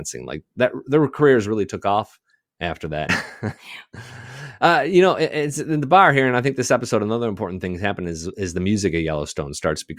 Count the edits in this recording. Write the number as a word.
one